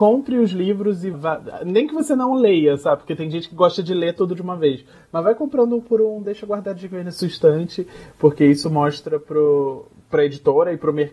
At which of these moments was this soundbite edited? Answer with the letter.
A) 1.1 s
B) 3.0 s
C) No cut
A